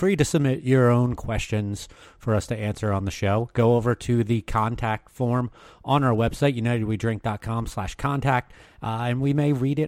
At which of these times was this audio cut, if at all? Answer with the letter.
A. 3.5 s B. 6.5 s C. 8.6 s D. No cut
C